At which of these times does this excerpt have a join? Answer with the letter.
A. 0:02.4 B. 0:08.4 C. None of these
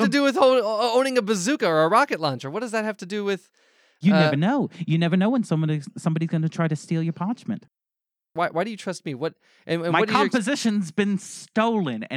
B